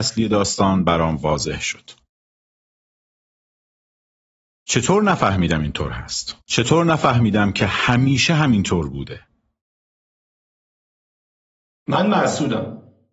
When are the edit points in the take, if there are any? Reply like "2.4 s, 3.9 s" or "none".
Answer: 6.4 s